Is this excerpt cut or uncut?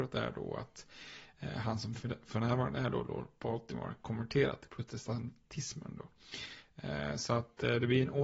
uncut